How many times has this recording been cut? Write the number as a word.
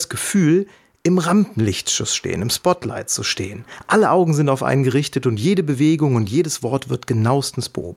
zero